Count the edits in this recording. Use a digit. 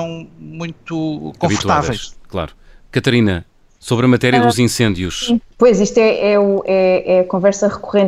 1